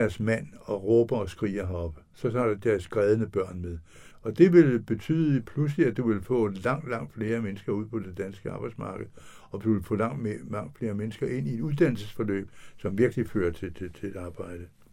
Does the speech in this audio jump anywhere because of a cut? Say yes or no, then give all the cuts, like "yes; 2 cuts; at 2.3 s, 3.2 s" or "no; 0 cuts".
yes; 1 cut; at 4.1 s